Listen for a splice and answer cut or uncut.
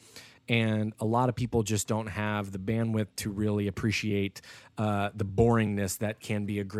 uncut